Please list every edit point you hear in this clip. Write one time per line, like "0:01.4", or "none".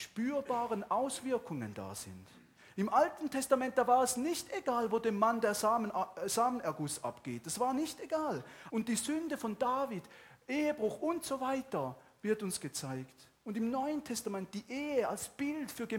0:08.7